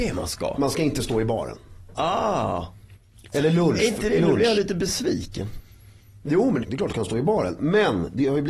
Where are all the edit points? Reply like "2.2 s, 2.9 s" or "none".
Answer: 6.6 s

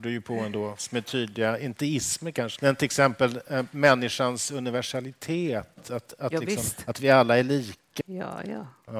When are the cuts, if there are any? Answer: 2.6 s, 8.0 s

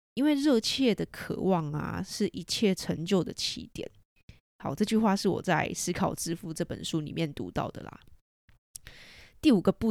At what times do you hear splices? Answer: none

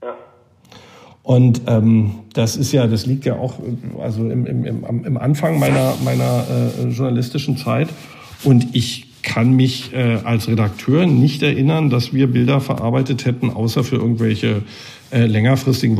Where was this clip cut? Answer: none

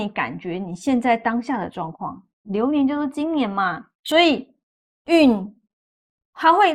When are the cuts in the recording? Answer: 2.4 s, 4.0 s

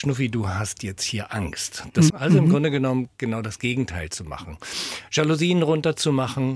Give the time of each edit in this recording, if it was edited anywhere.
2.1 s

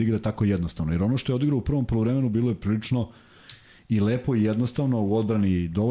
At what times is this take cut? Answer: none

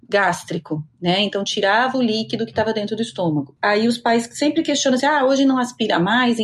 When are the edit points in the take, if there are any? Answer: none

